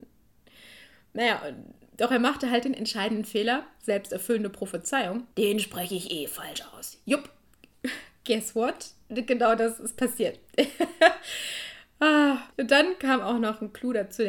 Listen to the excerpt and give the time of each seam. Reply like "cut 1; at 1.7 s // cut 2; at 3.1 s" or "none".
cut 1; at 5.3 s // cut 2; at 12.5 s